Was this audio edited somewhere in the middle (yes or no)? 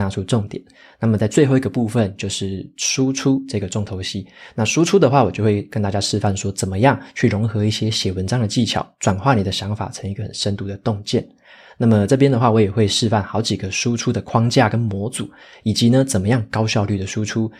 no